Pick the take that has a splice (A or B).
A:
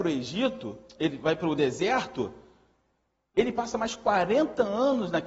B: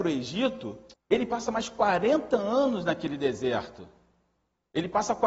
B